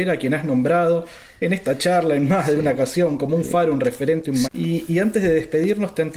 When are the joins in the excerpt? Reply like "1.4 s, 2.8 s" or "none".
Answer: 4.4 s